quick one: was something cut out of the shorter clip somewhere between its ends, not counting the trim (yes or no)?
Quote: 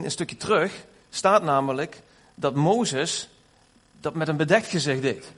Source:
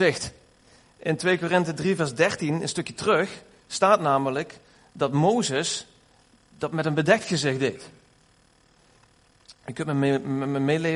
no